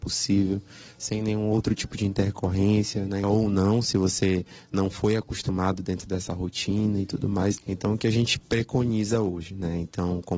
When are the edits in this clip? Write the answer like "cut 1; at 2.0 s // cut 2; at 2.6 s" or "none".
cut 1; at 3.2 s // cut 2; at 7.6 s